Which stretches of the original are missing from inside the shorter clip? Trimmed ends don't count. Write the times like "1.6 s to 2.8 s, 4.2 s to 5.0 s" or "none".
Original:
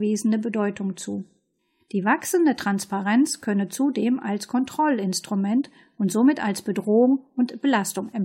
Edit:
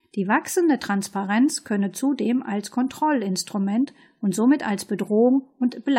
none